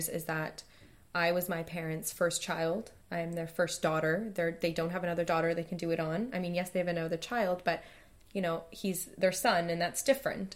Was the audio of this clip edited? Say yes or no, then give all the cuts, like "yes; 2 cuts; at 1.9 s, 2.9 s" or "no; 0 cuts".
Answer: no; 0 cuts